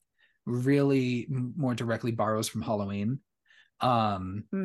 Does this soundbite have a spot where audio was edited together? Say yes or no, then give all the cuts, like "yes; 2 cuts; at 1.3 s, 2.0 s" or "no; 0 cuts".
no; 0 cuts